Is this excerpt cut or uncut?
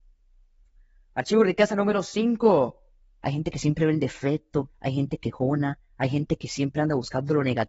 cut